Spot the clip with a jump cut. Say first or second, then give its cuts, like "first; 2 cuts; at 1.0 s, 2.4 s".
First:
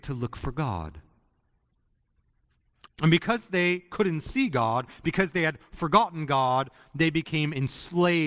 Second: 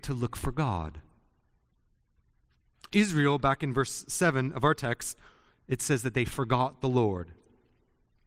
first; 1 cut; at 2.9 s